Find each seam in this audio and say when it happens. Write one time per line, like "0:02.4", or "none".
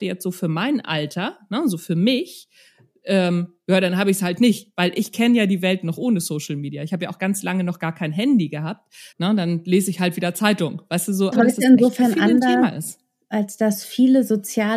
0:09.1
0:11.3